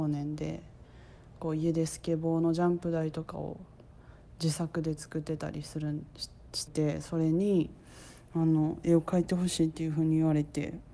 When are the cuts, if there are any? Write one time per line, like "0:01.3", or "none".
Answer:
0:06.7